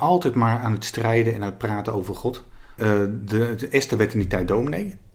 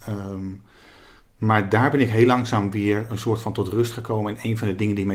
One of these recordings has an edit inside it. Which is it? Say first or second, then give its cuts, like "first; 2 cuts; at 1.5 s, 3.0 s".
first; 1 cut; at 2.8 s